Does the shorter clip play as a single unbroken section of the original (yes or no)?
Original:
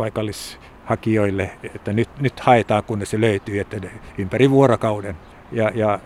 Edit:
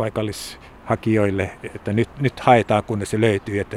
yes